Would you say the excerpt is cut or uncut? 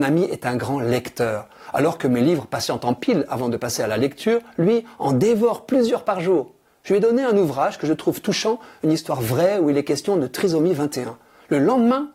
uncut